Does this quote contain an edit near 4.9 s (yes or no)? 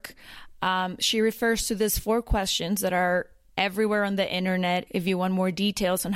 yes